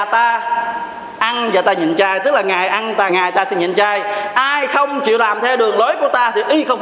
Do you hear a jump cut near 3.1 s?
yes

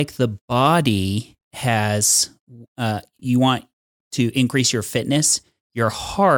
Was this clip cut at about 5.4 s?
no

